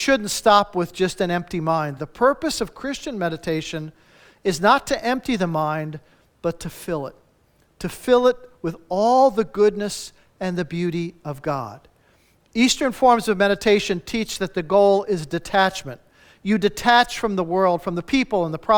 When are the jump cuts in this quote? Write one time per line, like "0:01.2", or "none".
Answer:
none